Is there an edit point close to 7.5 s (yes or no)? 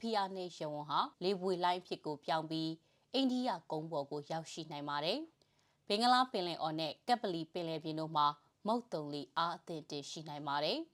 no